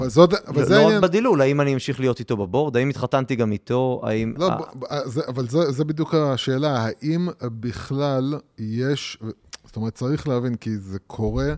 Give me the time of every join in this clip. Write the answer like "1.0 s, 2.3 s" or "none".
none